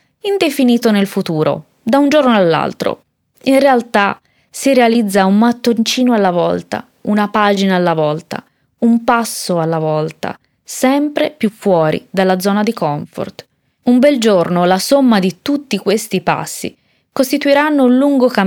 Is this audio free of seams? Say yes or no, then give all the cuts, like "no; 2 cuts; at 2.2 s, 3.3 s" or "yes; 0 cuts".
yes; 0 cuts